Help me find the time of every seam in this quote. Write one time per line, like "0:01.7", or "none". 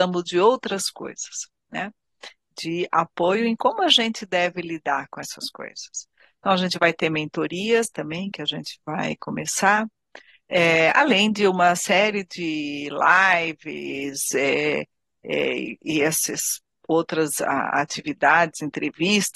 none